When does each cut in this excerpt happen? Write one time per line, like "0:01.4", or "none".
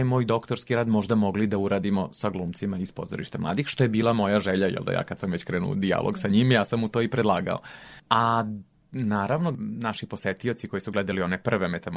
none